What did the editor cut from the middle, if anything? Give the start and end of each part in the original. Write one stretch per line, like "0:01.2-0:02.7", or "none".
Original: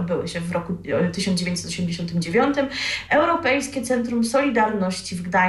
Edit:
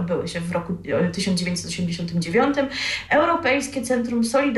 none